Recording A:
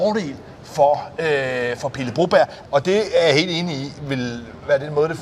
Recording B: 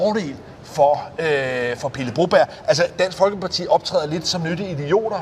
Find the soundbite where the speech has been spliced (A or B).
A